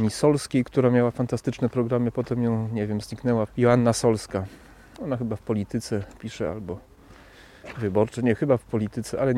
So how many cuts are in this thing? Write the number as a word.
one